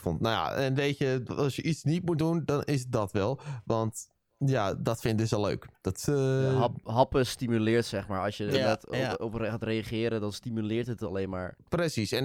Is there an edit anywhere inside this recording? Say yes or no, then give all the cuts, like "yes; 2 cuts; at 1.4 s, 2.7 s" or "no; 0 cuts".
no; 0 cuts